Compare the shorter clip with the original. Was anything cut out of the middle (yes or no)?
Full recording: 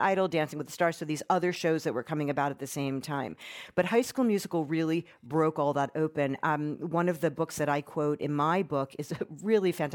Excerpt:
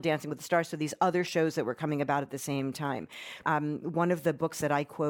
yes